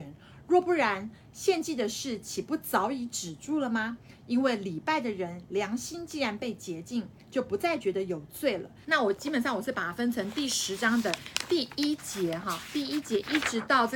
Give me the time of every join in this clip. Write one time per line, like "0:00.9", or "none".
0:08.8